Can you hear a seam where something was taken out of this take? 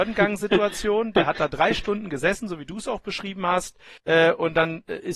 yes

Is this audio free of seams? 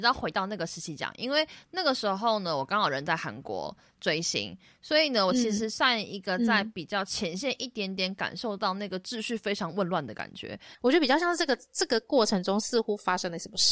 no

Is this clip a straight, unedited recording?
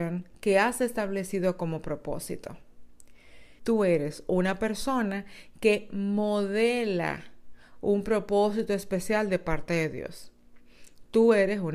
no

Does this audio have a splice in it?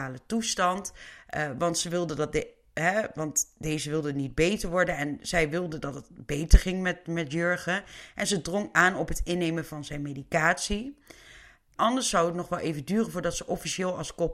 yes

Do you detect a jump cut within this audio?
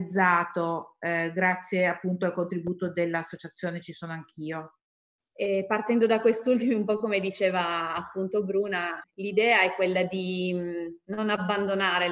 yes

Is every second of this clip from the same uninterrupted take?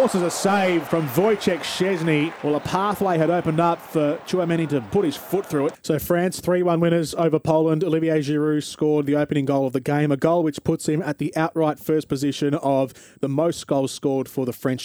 no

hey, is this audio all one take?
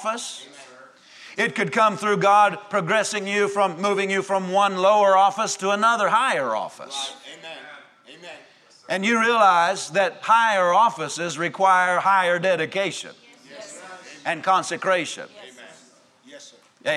yes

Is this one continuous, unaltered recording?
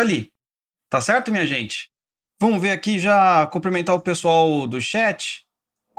yes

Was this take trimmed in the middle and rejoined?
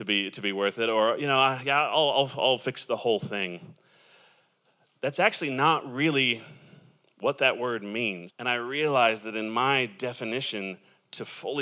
yes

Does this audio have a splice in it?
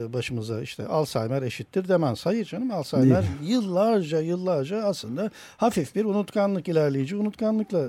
no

